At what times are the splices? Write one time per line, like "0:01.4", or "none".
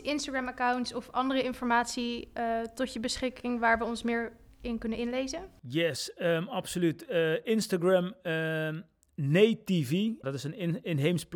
0:10.2